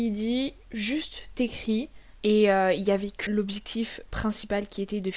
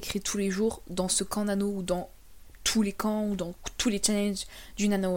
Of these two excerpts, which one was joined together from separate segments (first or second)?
first